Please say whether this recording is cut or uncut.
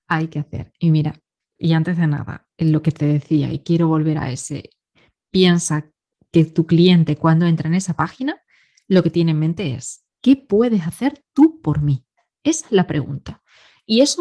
cut